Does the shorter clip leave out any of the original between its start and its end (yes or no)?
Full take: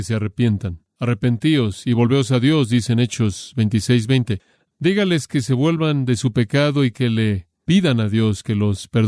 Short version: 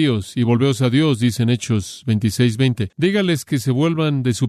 yes